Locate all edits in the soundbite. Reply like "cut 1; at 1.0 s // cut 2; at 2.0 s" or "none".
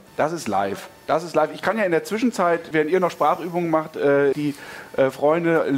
cut 1; at 2.7 s // cut 2; at 4.3 s